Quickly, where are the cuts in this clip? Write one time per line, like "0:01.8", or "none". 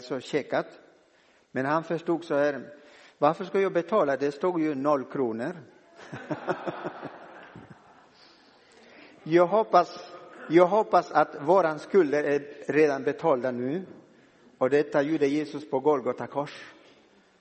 none